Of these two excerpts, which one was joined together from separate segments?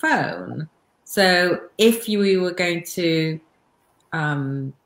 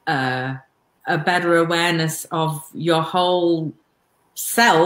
second; 1 cut; at 0.9 s

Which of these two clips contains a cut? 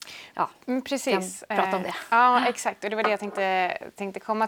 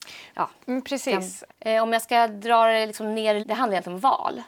second; 2 cuts; at 1.5 s, 3.4 s

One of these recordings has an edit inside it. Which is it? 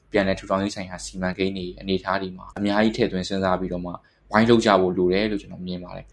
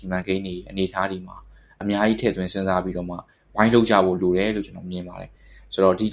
first; 1 cut; at 2.5 s

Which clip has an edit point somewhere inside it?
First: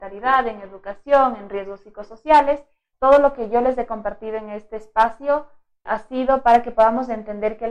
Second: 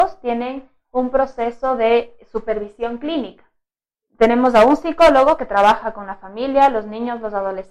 first; 2 cuts; at 2.9 s, 5.9 s

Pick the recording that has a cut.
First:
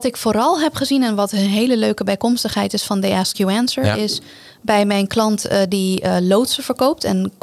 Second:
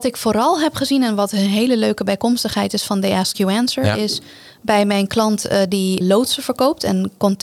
second; 1 cut; at 6.0 s

